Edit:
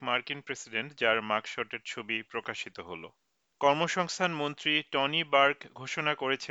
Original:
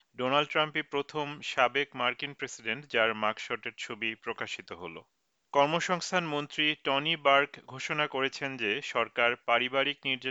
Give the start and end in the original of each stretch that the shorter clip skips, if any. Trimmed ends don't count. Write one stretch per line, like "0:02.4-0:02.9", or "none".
none